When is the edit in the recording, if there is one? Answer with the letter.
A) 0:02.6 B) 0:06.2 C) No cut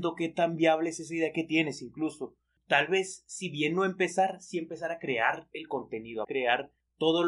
B